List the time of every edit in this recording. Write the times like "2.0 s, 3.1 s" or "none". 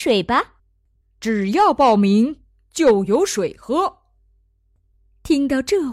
1.0 s

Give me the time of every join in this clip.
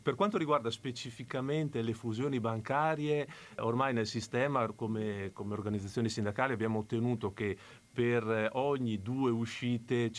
3.6 s

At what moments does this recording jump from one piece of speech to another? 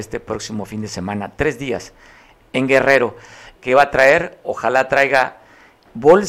3.6 s

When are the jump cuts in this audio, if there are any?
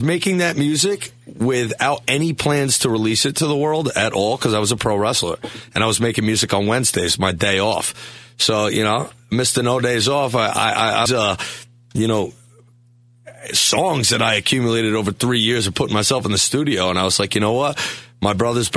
11.1 s

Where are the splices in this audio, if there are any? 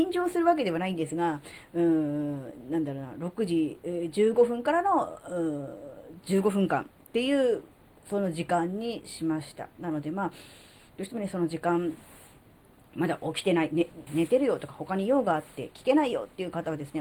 14.1 s

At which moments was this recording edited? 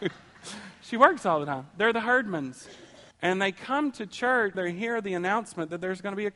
3.1 s, 4.5 s

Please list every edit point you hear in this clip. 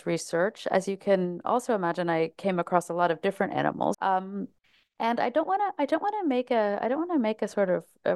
3.9 s

